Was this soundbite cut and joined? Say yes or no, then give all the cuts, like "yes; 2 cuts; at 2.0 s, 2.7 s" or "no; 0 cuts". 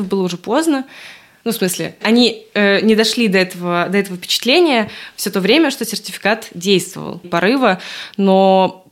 yes; 2 cuts; at 2.0 s, 7.2 s